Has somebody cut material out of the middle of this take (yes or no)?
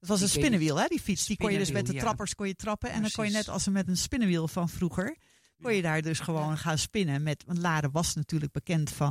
no